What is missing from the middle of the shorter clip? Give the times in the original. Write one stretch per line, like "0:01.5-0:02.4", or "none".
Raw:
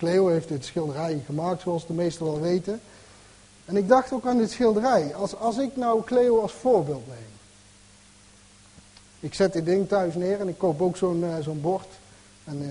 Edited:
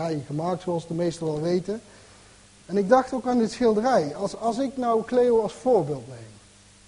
none